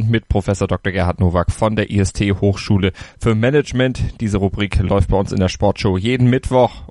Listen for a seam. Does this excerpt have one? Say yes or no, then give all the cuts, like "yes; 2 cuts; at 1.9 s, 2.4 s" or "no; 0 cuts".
no; 0 cuts